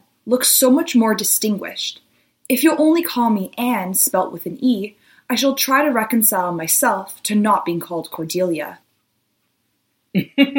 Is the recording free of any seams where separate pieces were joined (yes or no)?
yes